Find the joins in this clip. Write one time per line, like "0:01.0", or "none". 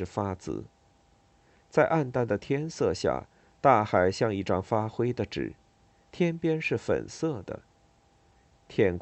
0:06.0